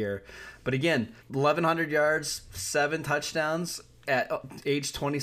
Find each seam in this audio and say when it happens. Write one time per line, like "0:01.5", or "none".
0:01.2